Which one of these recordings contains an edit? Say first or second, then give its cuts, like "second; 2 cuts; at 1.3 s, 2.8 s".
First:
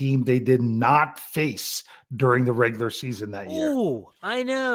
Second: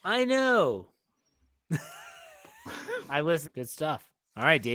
second; 1 cut; at 3.4 s